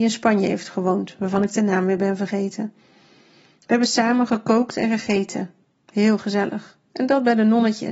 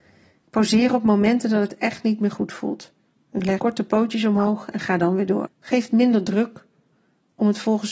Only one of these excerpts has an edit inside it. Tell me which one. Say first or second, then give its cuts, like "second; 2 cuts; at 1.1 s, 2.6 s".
second; 2 cuts; at 3.6 s, 5.5 s